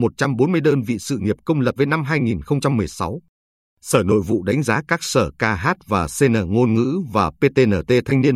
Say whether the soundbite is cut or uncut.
cut